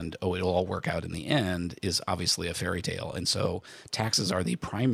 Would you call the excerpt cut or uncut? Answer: uncut